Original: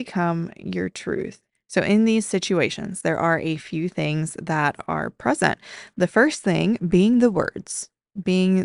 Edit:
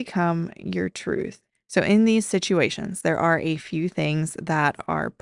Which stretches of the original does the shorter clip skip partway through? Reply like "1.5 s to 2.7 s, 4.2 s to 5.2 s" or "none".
none